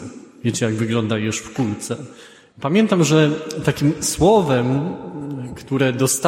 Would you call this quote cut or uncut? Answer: cut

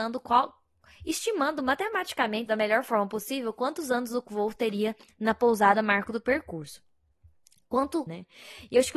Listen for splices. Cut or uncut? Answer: cut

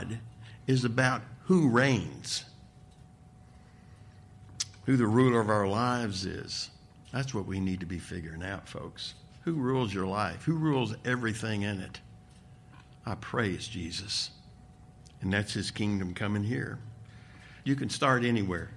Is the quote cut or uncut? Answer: cut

